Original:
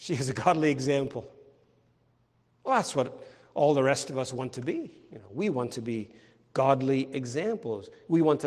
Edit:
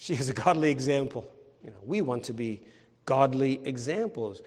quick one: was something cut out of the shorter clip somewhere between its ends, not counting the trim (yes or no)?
yes